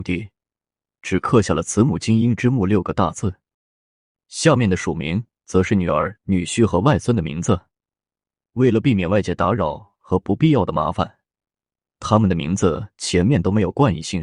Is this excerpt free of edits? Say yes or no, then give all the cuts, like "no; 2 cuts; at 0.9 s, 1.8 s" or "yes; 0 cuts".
yes; 0 cuts